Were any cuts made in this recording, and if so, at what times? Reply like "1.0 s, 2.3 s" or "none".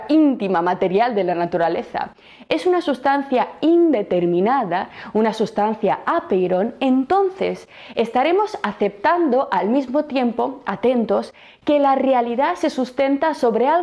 none